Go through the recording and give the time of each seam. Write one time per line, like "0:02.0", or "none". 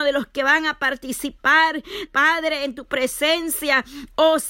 0:02.1